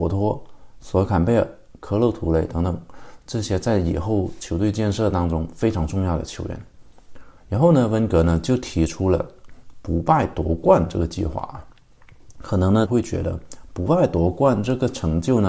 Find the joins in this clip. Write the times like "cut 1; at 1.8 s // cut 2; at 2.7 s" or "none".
cut 1; at 7.4 s // cut 2; at 12.9 s

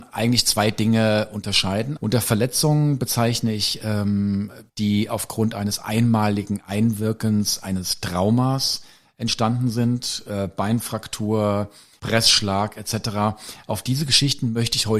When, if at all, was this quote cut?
cut 1; at 2.0 s // cut 2; at 4.7 s // cut 3; at 12.0 s

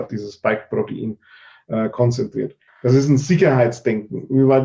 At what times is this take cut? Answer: cut 1; at 2.7 s

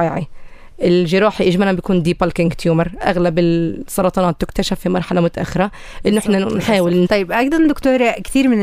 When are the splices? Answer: cut 1; at 7.1 s

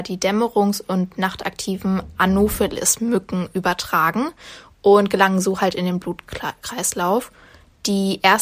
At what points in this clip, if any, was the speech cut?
none

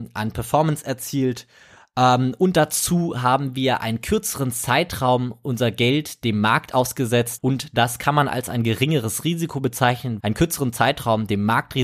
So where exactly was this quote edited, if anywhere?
cut 1; at 7.4 s // cut 2; at 10.2 s

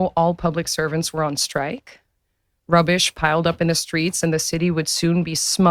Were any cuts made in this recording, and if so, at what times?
none

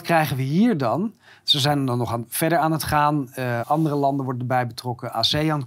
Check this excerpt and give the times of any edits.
cut 1; at 3.6 s

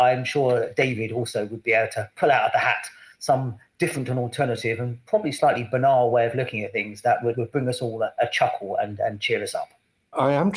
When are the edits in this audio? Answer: cut 1; at 7.3 s

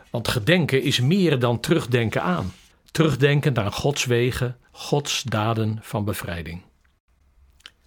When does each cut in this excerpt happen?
cut 1; at 2.7 s // cut 2; at 4.7 s

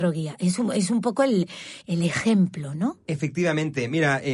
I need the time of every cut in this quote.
none

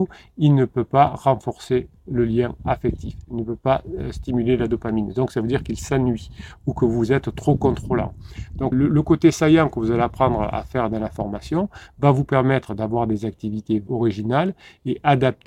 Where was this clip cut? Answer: cut 1; at 8.7 s // cut 2; at 13.9 s

